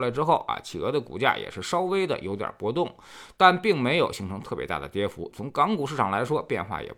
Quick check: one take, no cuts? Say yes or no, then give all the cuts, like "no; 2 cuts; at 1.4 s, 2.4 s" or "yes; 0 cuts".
yes; 0 cuts